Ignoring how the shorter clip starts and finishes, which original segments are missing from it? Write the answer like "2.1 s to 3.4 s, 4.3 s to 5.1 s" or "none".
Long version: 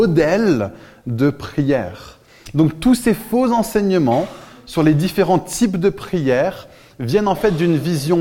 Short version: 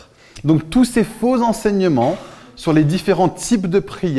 none